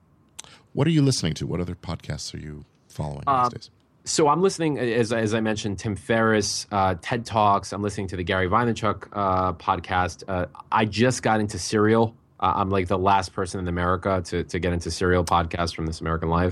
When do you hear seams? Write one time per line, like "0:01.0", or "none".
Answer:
none

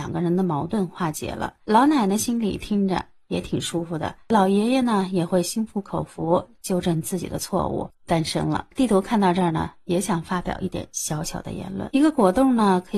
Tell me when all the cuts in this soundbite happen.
0:07.9

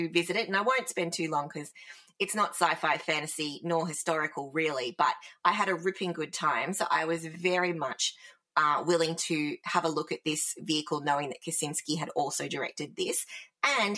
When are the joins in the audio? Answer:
none

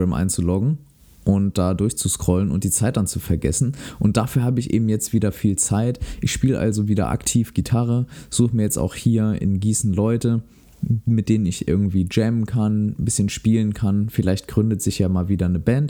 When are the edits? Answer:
none

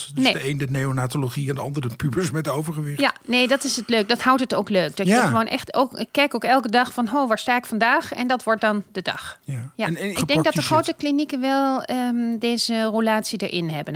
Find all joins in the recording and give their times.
0:10.1

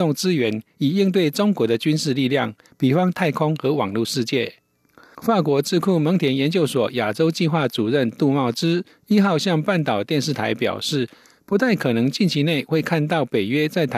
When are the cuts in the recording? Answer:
0:05.1

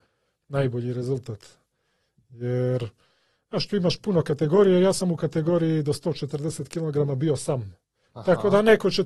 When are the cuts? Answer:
none

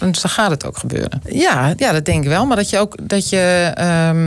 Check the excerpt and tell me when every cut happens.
0:01.2

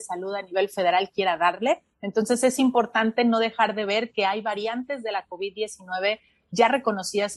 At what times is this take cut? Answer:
0:01.9

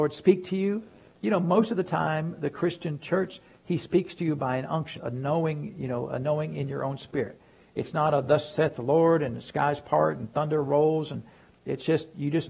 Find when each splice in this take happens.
0:05.0

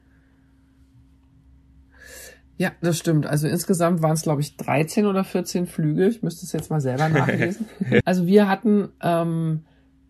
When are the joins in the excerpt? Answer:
0:08.0

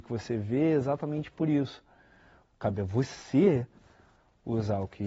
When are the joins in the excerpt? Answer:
0:02.5

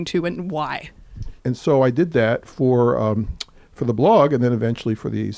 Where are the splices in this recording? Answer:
0:01.4

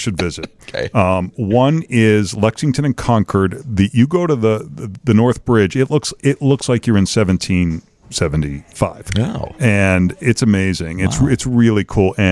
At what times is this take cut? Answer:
none

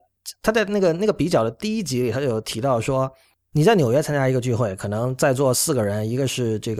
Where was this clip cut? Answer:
none

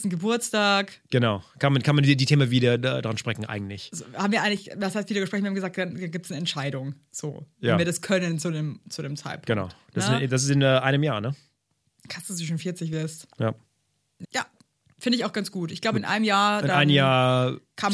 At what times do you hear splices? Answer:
0:14.2

